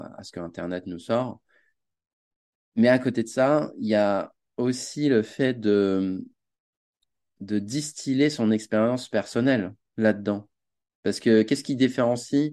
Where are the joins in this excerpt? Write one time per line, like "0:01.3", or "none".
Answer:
none